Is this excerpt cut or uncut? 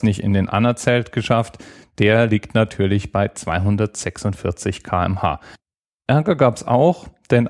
uncut